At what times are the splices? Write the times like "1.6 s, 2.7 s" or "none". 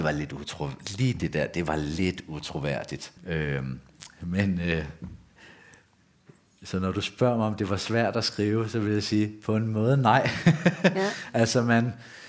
3.2 s

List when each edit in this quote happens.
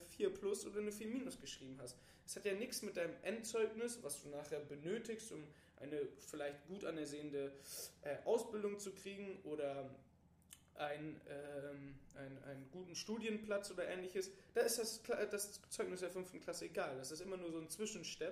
12.1 s

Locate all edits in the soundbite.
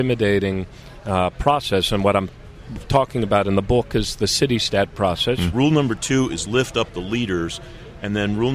5.5 s

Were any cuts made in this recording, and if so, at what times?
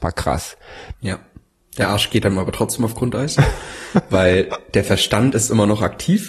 0.9 s

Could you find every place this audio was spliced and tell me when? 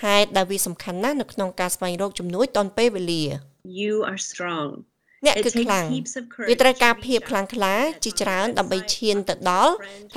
4.3 s

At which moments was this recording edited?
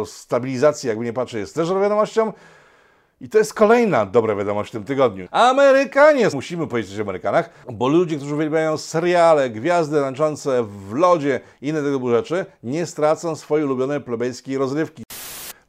5.3 s, 6.3 s, 7.6 s

